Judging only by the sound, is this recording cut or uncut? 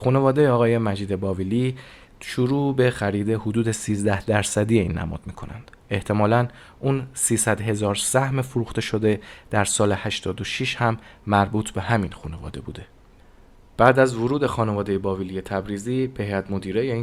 cut